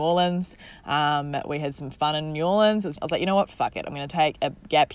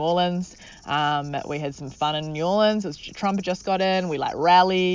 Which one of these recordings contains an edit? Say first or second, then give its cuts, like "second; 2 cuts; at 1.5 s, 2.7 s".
first; 1 cut; at 3.0 s